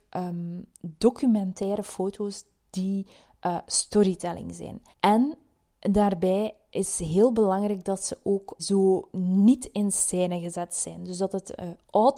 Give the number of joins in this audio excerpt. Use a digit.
2